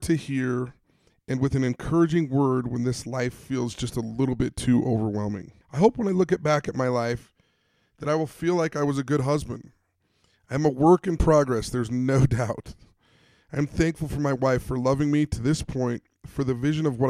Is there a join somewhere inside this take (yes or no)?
yes